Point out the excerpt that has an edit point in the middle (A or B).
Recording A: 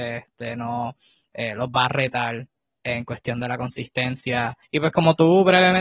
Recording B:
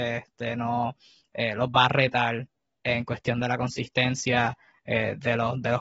A